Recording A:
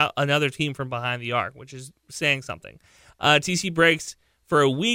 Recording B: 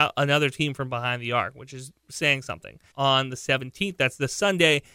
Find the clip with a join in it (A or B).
B